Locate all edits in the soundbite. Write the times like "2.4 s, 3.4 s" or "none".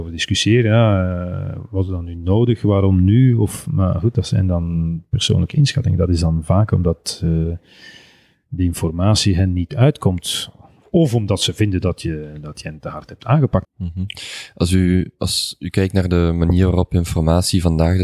13.6 s

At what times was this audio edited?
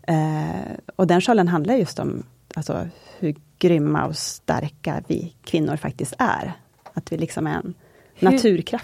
none

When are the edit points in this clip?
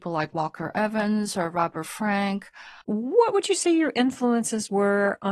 2.8 s

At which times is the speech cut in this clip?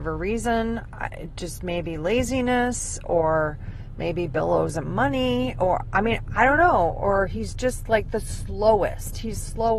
none

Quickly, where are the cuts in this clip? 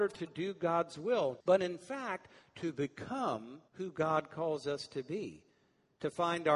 1.4 s, 3.7 s

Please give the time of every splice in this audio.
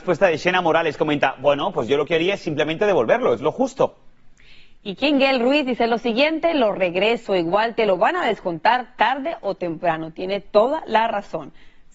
none

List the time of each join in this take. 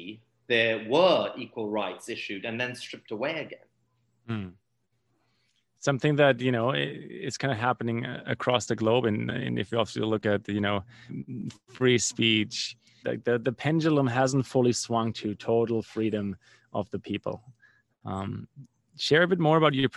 11.1 s, 13.0 s

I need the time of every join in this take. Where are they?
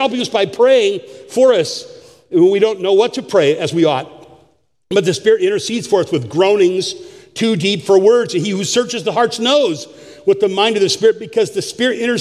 none

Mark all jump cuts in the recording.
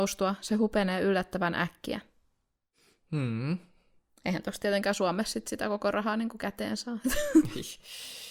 none

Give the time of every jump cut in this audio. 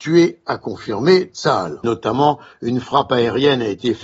1.8 s

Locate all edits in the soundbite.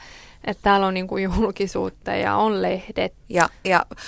3.1 s

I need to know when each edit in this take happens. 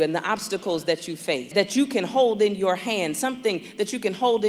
1.5 s

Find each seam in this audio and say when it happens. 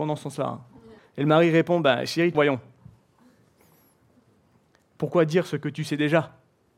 1.0 s, 2.3 s

